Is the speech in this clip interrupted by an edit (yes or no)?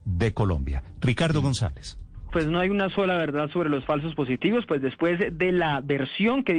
yes